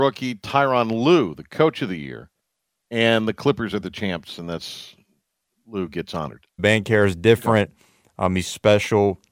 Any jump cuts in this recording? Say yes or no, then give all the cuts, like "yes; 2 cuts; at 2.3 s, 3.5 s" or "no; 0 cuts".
yes; 1 cut; at 6.6 s